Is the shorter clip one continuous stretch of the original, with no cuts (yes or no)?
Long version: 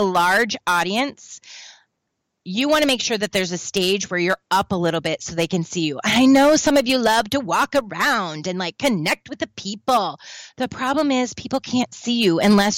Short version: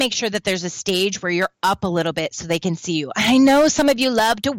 yes